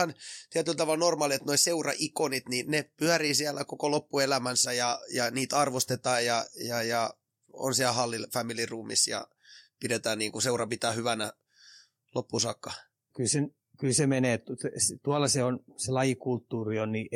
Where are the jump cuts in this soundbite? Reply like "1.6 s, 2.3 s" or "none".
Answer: 13.1 s